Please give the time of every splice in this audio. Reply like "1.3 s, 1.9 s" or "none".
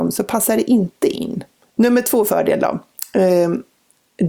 1.6 s

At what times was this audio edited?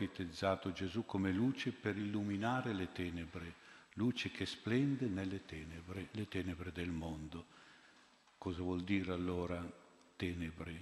none

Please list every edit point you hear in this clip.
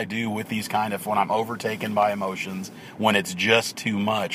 none

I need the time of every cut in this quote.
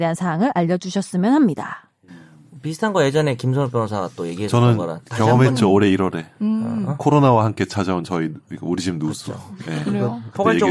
none

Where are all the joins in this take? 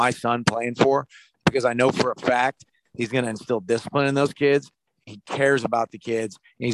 none

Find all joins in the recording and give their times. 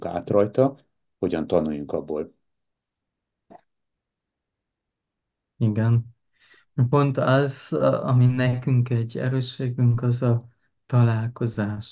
none

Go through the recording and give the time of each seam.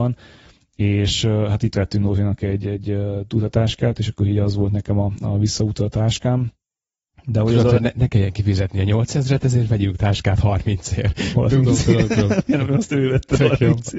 11.3 s

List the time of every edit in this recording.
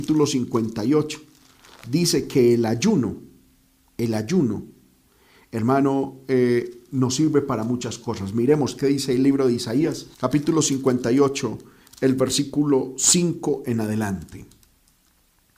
10.1 s

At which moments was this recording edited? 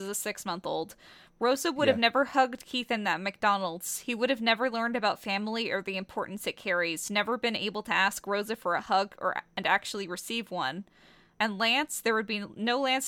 none

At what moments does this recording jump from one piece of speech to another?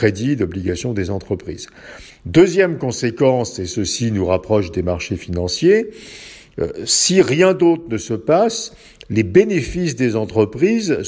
2.1 s

